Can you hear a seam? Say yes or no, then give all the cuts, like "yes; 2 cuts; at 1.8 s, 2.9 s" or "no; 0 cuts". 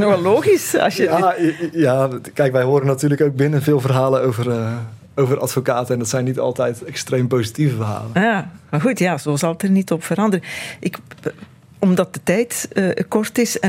no; 0 cuts